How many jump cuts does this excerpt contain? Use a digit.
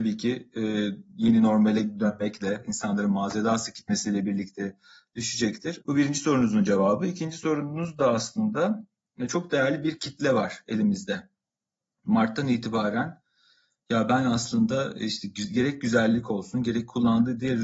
1